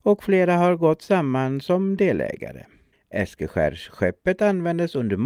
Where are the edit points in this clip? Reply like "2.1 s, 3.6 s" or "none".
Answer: 2.9 s